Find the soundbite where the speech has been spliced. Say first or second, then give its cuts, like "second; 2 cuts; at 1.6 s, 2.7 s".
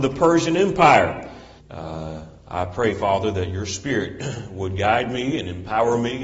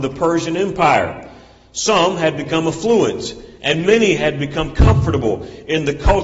first; 1 cut; at 1.6 s